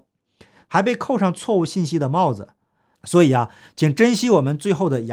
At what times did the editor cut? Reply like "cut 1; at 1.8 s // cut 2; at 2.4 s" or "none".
cut 1; at 2.9 s